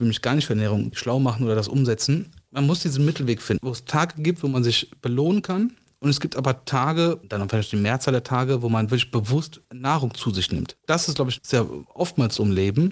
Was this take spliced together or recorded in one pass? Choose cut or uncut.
cut